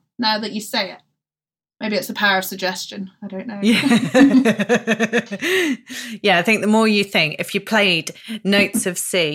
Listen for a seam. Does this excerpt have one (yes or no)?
no